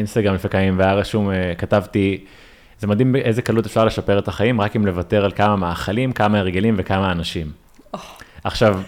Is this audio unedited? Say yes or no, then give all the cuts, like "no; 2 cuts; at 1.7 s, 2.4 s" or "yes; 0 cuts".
yes; 0 cuts